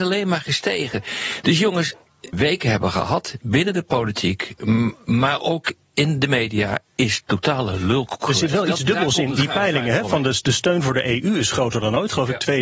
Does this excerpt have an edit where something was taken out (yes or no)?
yes